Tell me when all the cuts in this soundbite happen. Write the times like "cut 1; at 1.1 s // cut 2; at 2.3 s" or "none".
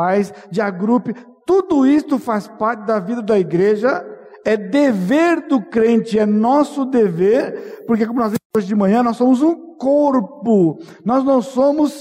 none